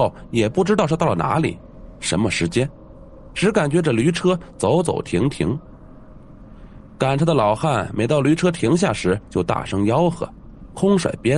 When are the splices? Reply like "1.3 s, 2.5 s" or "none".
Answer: none